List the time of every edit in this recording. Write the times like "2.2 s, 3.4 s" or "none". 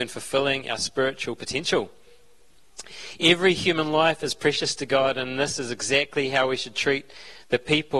none